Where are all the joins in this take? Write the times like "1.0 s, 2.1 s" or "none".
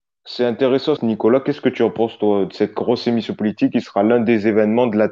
1.0 s